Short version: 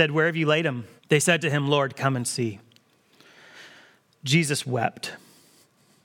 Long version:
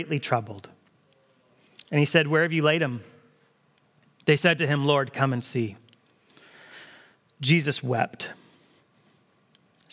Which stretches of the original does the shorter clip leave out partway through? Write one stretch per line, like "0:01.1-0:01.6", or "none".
0:03.1-0:04.1

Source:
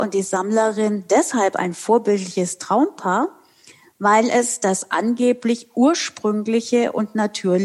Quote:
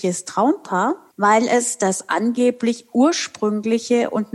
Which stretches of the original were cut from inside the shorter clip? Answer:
0:03.4-0:03.9

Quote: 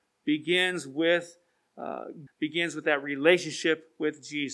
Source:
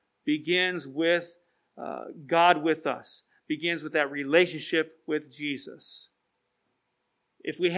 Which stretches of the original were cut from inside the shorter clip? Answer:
0:02.3-0:03.3

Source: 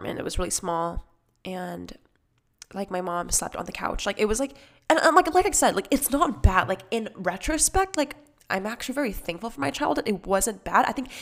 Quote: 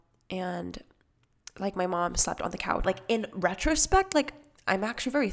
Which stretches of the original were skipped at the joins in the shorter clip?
0:04.0-0:06.7

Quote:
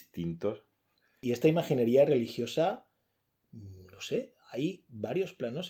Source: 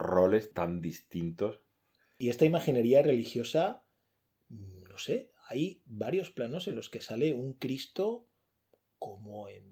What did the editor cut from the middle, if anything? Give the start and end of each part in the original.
none

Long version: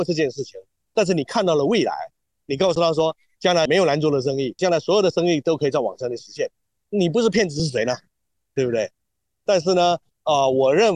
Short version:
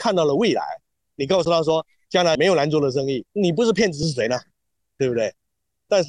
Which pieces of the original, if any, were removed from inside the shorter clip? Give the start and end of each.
0:04.6-0:06.8

